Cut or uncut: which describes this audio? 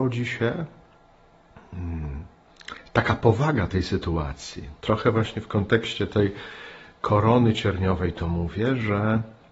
uncut